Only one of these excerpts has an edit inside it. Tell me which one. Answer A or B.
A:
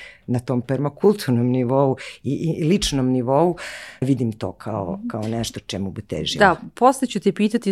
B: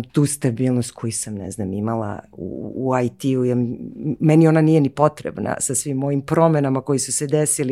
A